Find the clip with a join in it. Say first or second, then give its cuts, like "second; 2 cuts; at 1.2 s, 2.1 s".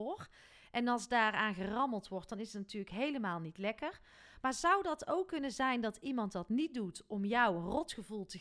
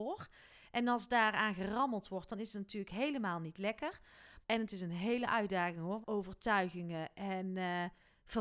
second; 2 cuts; at 4.4 s, 6.0 s